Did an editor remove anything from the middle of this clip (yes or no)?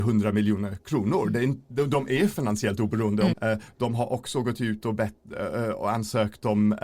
yes